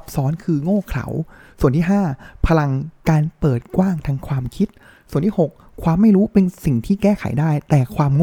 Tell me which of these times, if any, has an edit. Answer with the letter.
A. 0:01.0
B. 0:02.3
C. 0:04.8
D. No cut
D